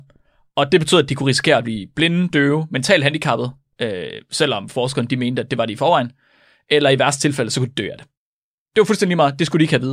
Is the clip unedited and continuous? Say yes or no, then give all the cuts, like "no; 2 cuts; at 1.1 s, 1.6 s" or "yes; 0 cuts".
yes; 0 cuts